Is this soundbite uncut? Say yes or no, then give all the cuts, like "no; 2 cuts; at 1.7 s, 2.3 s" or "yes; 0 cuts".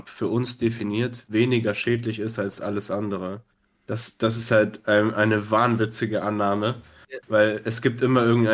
yes; 0 cuts